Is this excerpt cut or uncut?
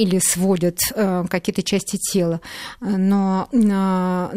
uncut